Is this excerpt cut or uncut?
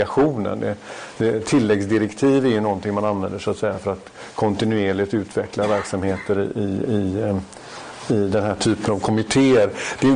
uncut